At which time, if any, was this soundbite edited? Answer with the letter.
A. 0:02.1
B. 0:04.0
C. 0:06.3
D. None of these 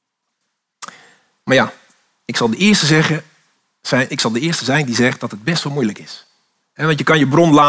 D